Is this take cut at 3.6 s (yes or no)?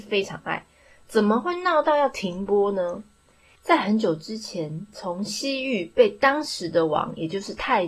yes